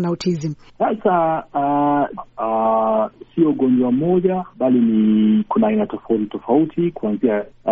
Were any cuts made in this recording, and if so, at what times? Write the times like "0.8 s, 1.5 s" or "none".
2.2 s